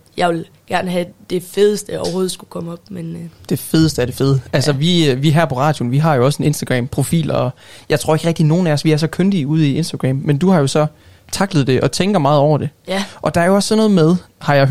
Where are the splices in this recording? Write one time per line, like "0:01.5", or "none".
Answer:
none

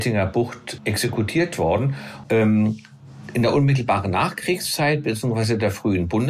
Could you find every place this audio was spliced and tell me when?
0:02.2

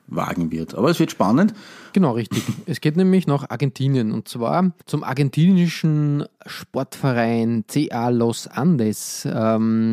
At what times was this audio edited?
0:01.9
0:04.8

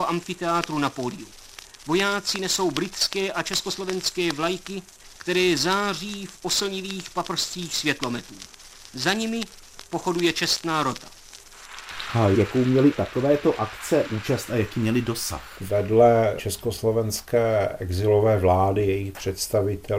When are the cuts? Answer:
none

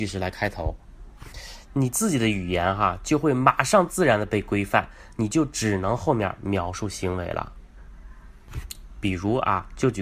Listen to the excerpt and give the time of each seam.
none

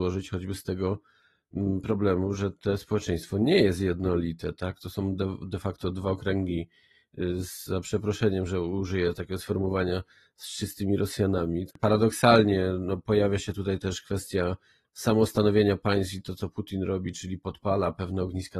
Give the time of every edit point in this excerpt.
0:11.7

